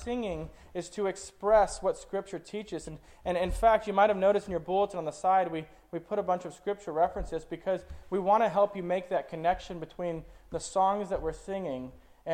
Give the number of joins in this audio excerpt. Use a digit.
0